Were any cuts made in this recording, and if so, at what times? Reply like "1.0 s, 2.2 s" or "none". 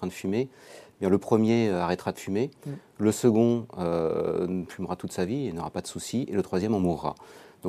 none